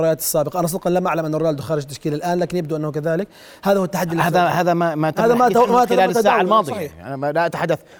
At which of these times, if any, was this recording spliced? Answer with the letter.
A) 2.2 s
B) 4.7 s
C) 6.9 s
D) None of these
D